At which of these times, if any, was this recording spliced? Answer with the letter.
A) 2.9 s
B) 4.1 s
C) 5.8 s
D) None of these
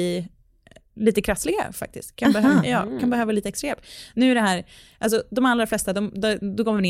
D